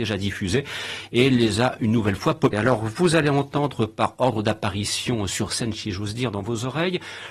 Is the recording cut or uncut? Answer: cut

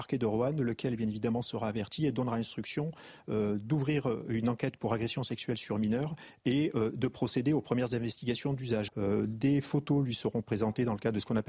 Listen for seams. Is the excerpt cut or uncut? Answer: cut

